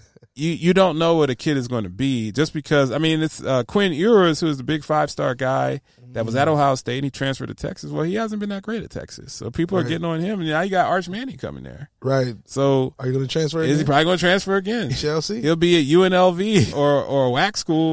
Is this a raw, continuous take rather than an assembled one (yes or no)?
no